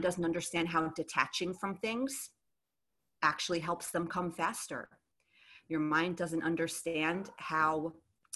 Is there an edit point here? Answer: no; 0 cuts

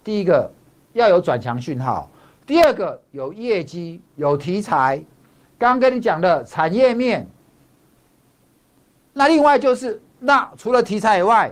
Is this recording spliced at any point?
no; 0 cuts

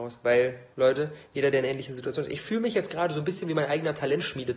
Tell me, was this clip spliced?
no; 0 cuts

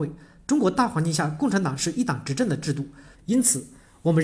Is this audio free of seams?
no; 1 cut; at 3.1 s

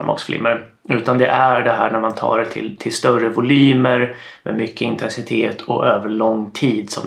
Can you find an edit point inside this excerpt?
no; 0 cuts

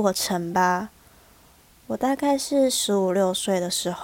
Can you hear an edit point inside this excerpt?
no; 0 cuts

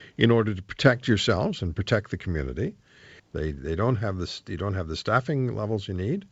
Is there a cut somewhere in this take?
yes; 1 cut; at 3.2 s

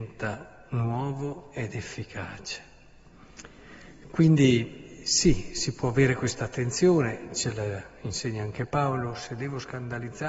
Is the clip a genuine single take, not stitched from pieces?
yes; 0 cuts

